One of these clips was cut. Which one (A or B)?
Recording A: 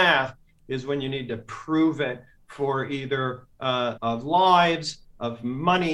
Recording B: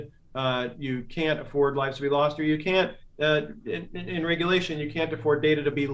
A